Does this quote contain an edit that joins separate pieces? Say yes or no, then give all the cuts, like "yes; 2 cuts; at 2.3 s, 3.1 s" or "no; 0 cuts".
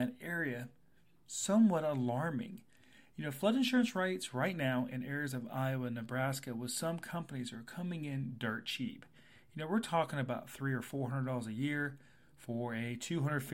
no; 0 cuts